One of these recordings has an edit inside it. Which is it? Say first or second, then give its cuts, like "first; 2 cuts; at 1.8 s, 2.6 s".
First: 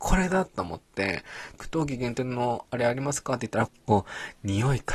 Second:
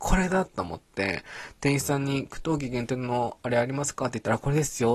first; 2 cuts; at 1.5 s, 3.7 s